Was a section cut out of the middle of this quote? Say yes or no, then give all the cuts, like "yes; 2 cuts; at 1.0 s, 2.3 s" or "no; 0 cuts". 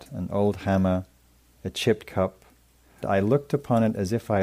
yes; 1 cut; at 3.0 s